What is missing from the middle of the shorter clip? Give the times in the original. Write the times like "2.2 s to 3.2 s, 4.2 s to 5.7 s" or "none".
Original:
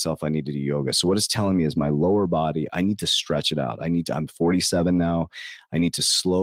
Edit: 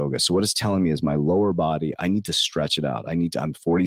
none